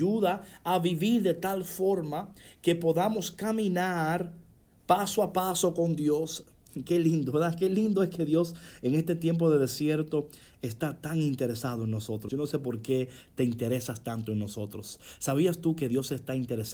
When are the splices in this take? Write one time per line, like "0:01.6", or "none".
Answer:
0:12.3